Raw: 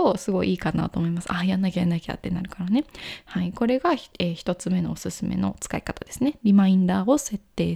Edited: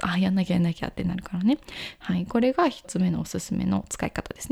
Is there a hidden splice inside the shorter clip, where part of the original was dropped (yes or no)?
yes